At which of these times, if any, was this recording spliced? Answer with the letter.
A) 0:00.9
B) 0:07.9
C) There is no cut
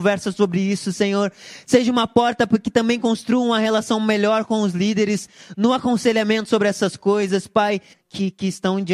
B